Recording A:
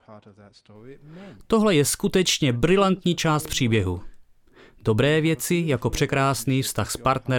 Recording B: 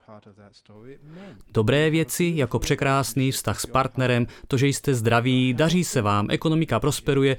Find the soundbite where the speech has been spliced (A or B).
B